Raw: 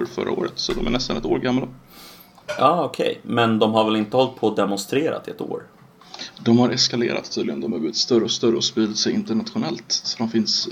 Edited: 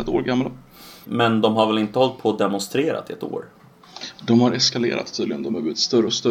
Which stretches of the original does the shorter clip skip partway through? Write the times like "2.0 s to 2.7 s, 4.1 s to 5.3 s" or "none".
2.2 s to 3.2 s